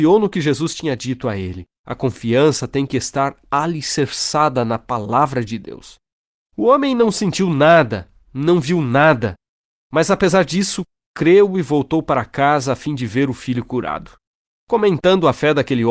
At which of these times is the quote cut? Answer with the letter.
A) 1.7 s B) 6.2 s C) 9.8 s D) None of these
A